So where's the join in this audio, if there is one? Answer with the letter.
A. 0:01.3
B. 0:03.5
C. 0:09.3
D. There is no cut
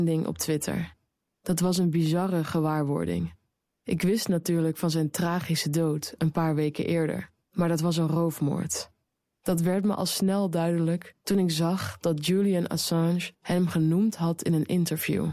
C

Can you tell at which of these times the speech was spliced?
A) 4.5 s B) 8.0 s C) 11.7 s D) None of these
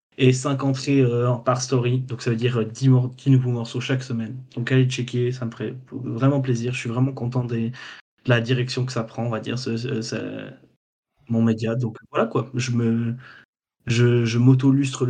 D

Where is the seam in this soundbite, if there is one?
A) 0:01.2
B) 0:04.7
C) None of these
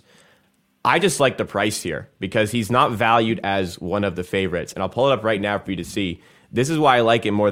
C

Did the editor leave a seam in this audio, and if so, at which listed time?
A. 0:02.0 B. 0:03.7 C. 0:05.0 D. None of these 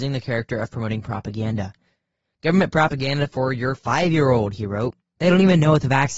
C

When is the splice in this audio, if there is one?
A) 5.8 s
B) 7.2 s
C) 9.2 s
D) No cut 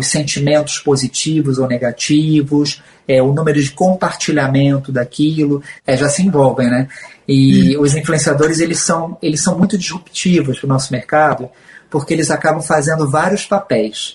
A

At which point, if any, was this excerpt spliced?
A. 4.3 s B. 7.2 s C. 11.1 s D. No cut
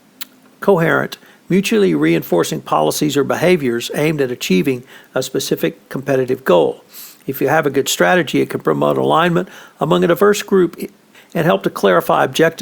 C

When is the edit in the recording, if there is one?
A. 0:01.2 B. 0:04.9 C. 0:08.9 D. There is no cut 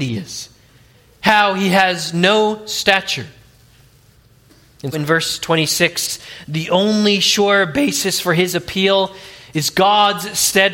B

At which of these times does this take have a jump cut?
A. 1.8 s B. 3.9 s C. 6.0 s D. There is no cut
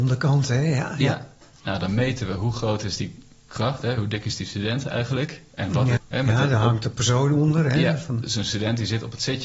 C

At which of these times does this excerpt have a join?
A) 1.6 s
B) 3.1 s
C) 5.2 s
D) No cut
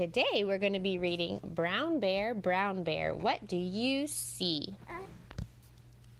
D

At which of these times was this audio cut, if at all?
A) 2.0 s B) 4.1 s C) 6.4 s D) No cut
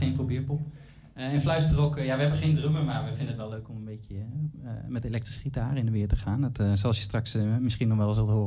D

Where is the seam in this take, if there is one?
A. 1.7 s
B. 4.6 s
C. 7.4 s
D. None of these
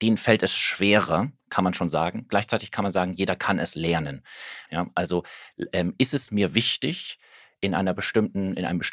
B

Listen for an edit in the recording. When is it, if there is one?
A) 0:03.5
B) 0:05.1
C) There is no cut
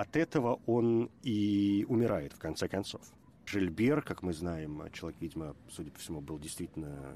A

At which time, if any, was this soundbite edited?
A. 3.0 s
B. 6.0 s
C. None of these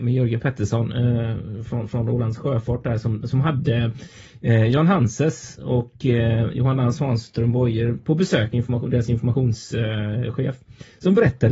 C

